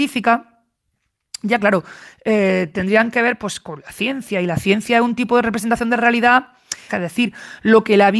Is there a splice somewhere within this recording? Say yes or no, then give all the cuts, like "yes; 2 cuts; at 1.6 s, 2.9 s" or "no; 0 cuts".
yes; 1 cut; at 6.9 s